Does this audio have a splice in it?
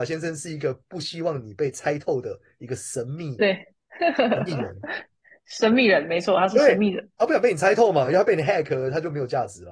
no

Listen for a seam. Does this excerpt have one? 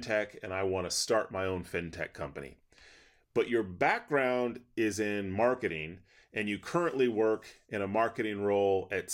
no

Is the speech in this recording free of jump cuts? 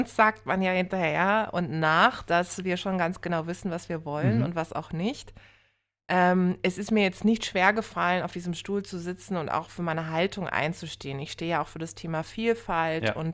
yes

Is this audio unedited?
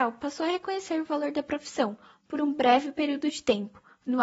yes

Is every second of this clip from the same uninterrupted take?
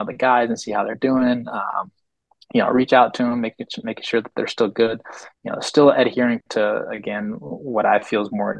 yes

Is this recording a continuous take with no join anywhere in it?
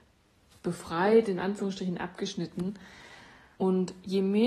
no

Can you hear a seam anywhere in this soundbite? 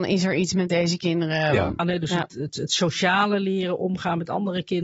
yes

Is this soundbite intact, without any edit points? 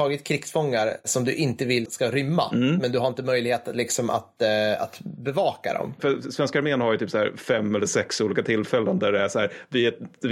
no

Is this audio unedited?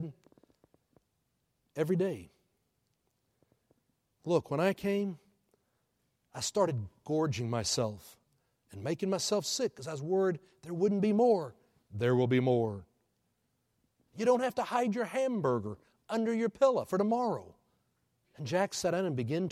no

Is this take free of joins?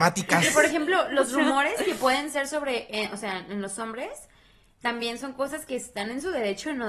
yes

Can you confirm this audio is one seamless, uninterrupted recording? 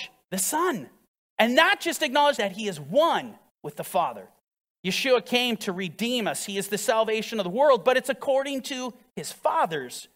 no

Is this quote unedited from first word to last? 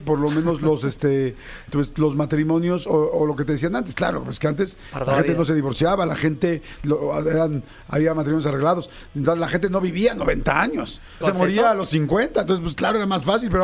no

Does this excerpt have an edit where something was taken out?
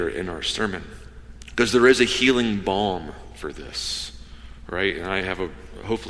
no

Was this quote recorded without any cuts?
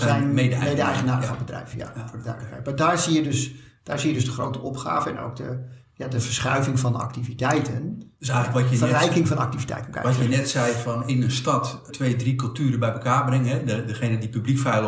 no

